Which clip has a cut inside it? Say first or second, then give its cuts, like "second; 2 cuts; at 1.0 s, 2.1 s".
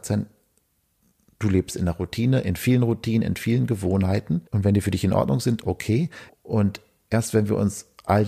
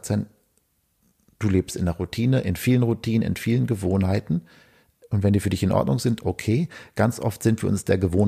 first; 2 cuts; at 4.5 s, 6.3 s